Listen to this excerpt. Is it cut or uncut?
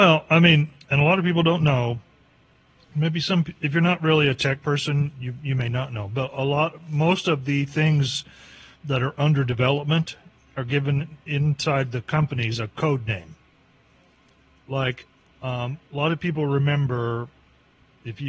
uncut